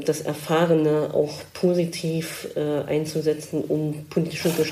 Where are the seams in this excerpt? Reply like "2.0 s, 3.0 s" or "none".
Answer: none